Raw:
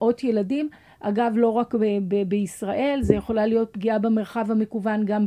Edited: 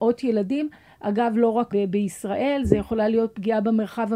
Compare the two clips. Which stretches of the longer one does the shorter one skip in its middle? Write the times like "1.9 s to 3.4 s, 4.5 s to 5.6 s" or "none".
1.7 s to 2.1 s